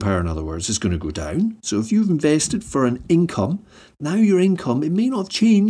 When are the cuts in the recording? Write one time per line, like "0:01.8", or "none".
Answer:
none

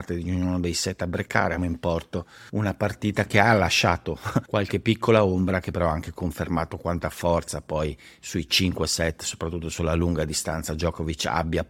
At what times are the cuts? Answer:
0:01.6

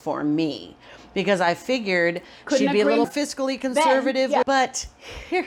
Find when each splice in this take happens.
0:03.0
0:04.4

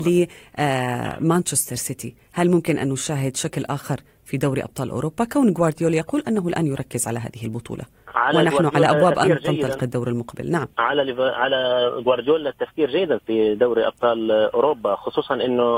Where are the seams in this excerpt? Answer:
0:09.2
0:10.7

